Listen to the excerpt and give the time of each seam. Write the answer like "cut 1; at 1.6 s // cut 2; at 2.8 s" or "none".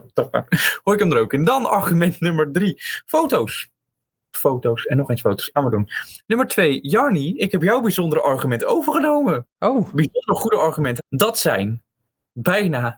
cut 1; at 4.3 s // cut 2; at 5.5 s // cut 3; at 11.0 s